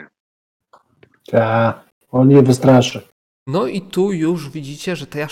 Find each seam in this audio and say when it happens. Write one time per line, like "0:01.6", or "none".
0:03.3